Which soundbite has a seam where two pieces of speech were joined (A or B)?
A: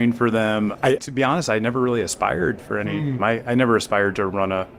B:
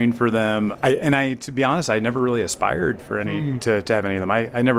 A